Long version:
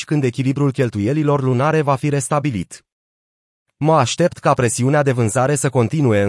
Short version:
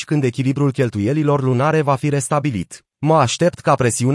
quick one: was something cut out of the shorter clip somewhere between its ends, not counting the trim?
yes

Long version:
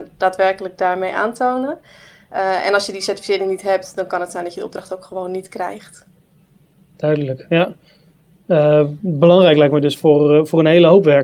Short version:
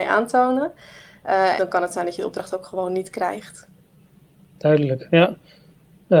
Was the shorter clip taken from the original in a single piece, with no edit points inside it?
no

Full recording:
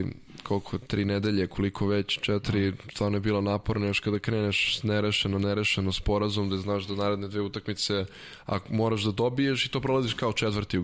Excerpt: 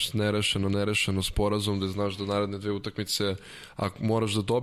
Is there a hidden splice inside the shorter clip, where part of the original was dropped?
no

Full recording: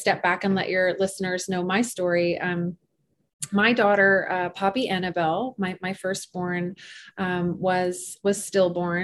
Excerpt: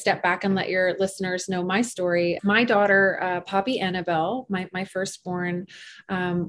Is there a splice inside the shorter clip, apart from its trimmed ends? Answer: yes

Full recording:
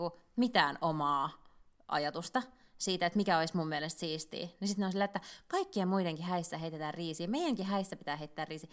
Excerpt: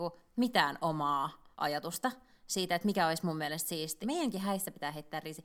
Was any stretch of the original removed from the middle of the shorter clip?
yes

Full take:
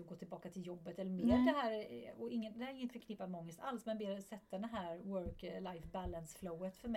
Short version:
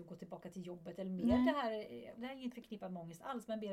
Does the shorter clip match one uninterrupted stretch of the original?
no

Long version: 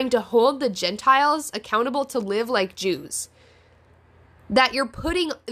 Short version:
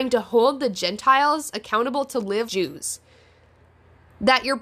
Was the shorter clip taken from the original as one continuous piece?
no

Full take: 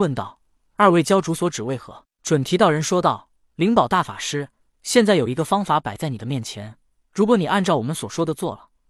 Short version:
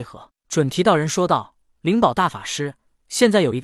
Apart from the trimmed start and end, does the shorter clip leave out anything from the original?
no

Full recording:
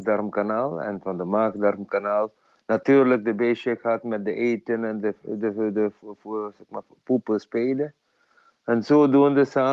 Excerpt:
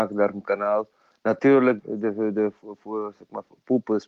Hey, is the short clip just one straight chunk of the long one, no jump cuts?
no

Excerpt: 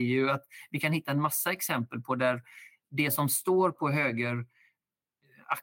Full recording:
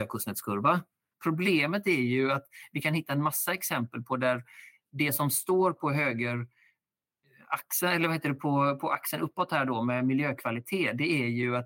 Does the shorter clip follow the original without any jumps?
yes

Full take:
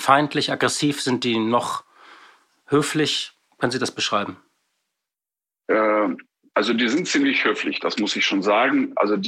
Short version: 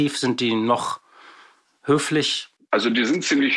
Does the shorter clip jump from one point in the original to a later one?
yes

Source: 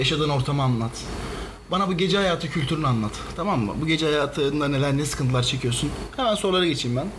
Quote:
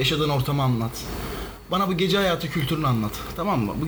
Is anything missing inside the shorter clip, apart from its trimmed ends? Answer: no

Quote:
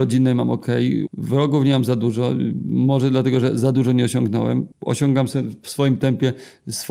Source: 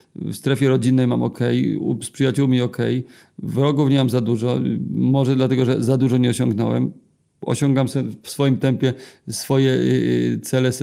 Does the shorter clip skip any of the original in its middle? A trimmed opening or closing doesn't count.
yes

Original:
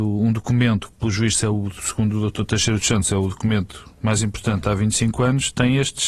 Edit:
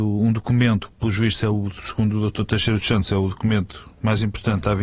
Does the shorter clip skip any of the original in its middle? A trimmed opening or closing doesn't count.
no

